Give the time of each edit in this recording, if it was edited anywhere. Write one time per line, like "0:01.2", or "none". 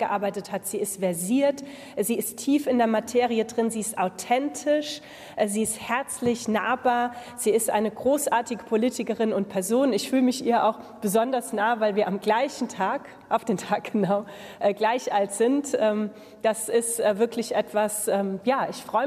none